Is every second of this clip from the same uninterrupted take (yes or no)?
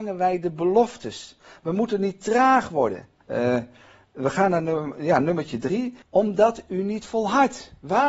no